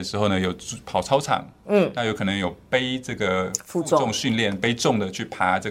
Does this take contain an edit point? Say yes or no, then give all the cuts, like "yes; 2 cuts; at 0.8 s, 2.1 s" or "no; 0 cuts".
no; 0 cuts